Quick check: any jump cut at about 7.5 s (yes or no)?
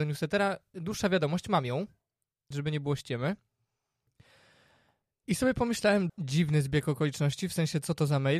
no